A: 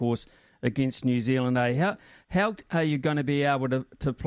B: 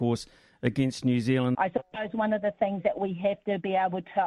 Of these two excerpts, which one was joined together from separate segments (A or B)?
B